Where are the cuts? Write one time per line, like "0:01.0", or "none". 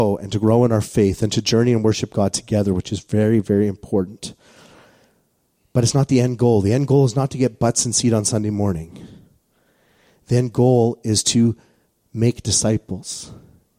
none